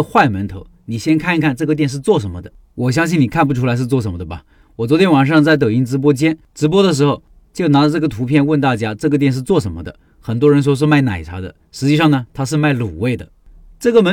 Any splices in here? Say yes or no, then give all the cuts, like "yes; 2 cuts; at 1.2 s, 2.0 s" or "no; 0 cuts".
no; 0 cuts